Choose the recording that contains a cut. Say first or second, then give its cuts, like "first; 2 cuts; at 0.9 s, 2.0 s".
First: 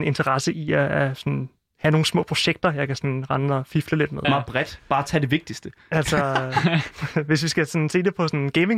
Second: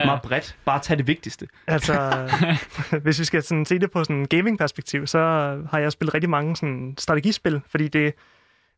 first; 1 cut; at 4.2 s